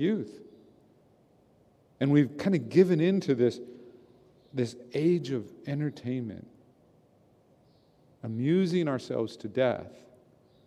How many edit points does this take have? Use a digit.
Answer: 0